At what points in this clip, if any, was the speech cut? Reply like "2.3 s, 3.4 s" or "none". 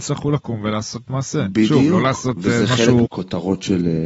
3.1 s